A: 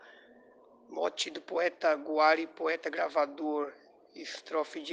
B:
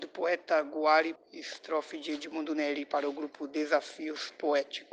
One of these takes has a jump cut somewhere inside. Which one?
B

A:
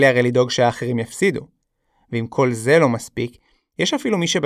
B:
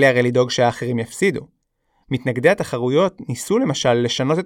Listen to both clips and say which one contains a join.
B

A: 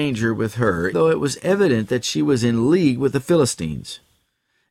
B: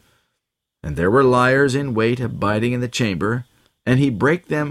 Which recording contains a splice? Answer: A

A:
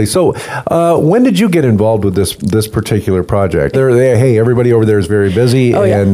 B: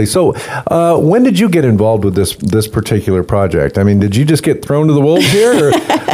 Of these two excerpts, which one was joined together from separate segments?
A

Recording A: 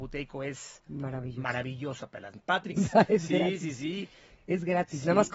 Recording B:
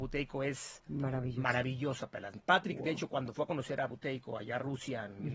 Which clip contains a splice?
A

